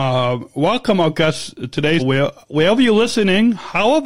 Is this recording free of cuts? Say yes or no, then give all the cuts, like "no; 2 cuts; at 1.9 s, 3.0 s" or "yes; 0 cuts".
no; 1 cut; at 2.0 s